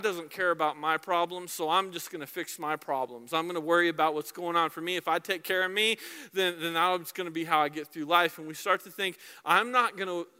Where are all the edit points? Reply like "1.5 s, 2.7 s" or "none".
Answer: none